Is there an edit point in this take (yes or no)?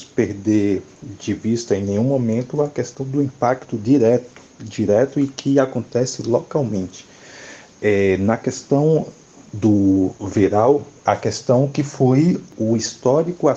yes